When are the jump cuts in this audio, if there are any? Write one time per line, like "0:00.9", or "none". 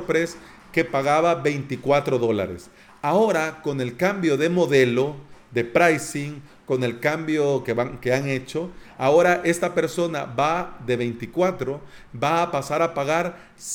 none